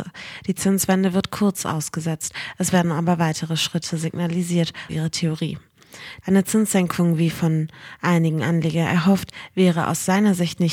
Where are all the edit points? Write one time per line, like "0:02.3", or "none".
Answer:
0:04.9
0:06.2